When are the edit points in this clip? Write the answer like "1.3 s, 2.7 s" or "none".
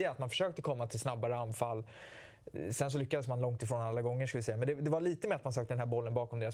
none